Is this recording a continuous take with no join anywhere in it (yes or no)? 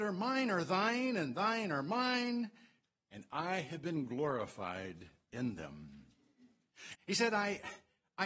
no